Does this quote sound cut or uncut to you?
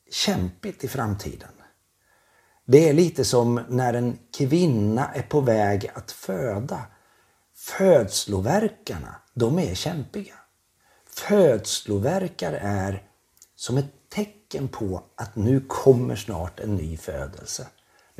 uncut